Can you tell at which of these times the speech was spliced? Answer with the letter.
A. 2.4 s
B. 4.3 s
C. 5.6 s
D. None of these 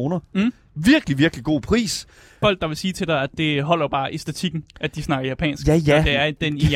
A